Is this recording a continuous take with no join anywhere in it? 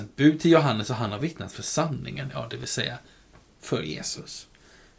yes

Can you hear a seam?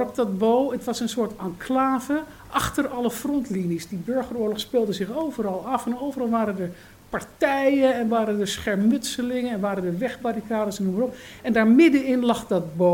no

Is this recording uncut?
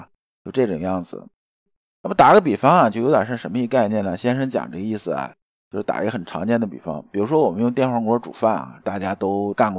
yes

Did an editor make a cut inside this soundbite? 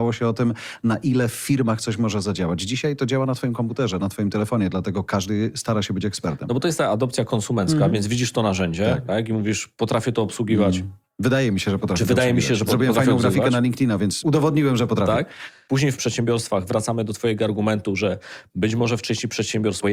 no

